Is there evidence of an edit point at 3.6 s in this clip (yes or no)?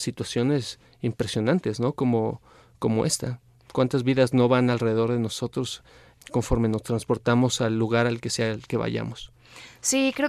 no